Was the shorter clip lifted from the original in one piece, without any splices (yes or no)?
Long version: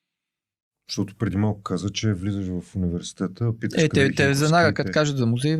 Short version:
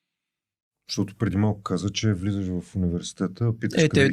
yes